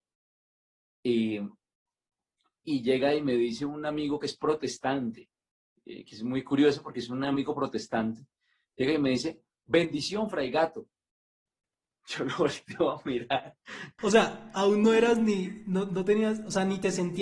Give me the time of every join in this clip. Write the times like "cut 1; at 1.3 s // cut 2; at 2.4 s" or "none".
none

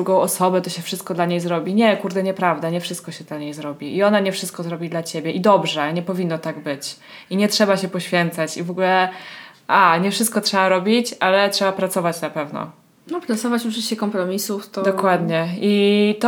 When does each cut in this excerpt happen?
none

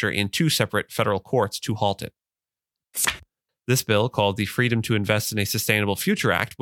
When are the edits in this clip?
cut 1; at 3.5 s

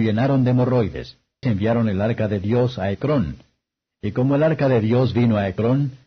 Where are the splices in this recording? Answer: cut 1; at 1.4 s

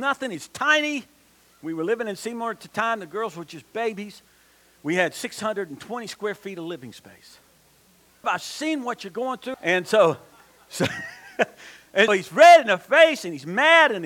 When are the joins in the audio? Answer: cut 1; at 8.2 s // cut 2; at 9.5 s // cut 3; at 12.1 s

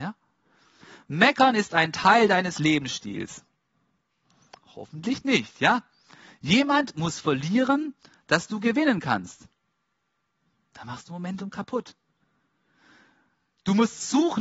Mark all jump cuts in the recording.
none

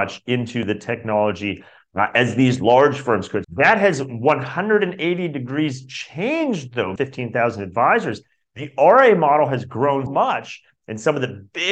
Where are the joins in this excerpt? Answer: cut 1; at 3.4 s // cut 2; at 7.0 s // cut 3; at 10.1 s

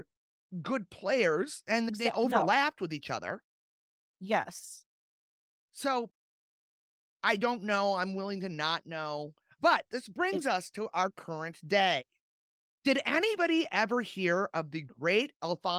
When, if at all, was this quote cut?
cut 1; at 9.6 s // cut 2; at 12.6 s

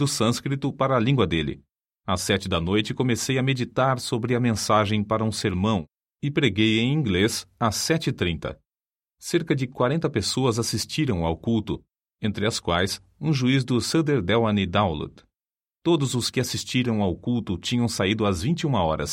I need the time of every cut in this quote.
cut 1; at 15.6 s

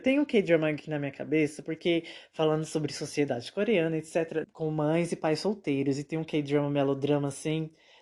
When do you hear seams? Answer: cut 1; at 4.4 s

